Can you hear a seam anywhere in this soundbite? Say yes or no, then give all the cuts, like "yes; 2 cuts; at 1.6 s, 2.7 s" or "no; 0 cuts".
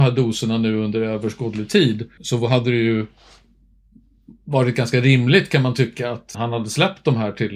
yes; 2 cuts; at 2.2 s, 6.3 s